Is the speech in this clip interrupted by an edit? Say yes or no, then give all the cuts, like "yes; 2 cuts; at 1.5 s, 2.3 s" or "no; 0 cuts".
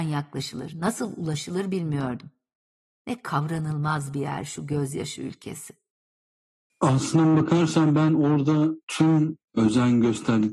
yes; 1 cut; at 6.7 s